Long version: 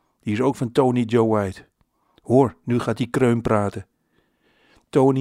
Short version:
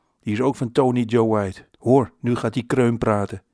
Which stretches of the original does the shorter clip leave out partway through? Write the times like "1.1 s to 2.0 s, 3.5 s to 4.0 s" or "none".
1.7 s to 2.2 s